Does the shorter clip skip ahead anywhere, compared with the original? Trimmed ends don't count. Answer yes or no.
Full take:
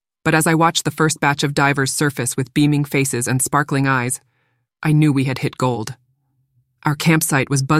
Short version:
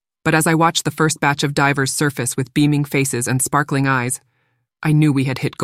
no